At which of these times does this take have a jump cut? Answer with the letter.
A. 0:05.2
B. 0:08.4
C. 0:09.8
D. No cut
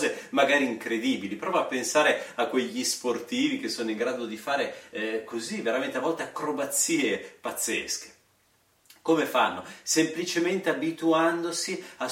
D